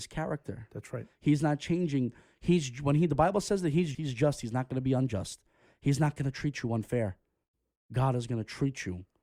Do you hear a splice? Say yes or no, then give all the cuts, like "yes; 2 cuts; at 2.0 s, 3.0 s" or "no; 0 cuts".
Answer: yes; 1 cut; at 3.9 s